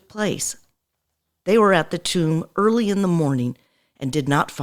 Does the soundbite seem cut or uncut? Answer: cut